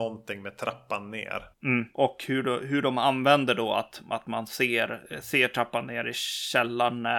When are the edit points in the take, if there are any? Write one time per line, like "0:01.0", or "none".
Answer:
none